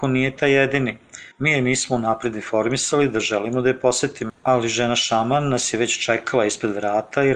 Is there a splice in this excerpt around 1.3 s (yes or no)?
yes